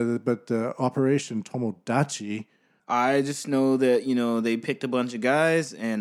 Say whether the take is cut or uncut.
cut